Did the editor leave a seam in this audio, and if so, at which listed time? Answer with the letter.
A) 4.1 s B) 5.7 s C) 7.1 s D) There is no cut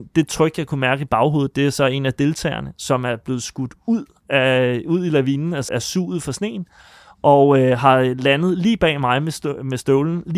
B